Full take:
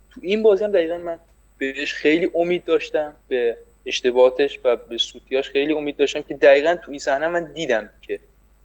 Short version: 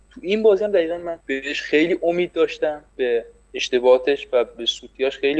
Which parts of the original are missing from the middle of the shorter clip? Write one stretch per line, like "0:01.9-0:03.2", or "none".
0:01.2-0:01.5

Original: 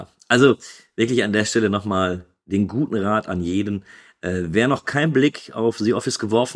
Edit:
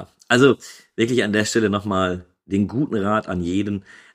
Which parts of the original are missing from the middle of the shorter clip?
none

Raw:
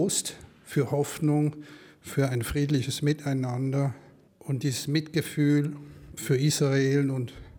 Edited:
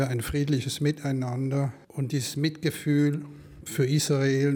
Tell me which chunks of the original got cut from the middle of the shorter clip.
0:04.1-0:04.4

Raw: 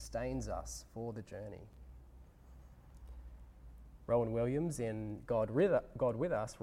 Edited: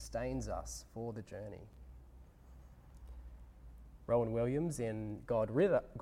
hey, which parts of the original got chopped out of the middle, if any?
none

